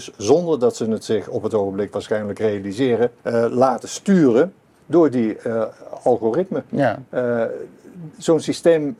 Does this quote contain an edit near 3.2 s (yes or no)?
yes